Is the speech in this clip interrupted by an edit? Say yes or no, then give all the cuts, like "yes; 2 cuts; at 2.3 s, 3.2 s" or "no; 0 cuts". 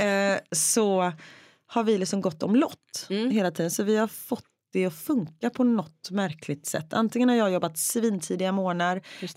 no; 0 cuts